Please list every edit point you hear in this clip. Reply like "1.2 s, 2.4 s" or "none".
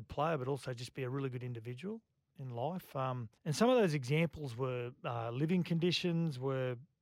3.4 s